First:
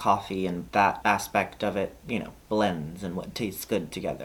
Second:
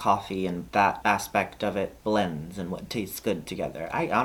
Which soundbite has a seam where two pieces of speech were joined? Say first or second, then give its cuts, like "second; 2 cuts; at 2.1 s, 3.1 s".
second; 1 cut; at 2.0 s